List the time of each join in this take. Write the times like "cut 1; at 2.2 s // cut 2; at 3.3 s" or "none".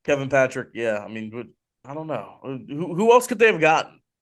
cut 1; at 1.8 s